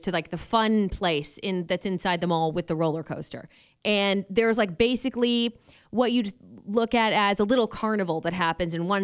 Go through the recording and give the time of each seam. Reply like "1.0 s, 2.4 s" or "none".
none